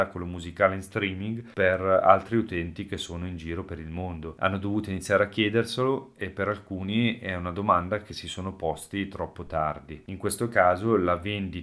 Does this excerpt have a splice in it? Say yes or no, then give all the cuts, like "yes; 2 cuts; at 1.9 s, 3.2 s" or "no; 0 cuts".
yes; 2 cuts; at 4.4 s, 10.1 s